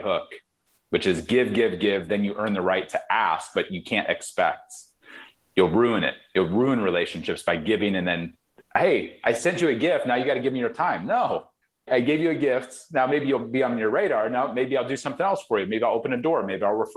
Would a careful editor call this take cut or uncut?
uncut